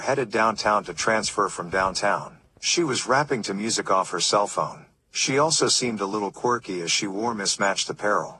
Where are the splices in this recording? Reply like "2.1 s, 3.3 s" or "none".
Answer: 2.6 s